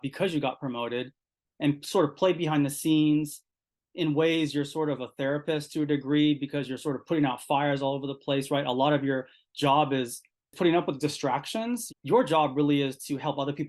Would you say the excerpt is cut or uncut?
cut